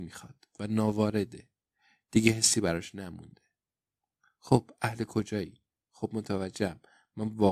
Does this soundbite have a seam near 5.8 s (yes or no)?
yes